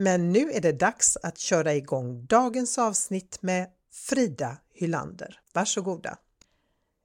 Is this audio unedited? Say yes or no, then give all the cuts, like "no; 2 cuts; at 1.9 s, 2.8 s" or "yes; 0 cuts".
no; 1 cut; at 5.4 s